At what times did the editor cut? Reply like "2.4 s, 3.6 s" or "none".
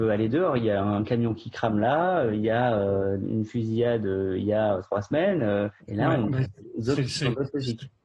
5.8 s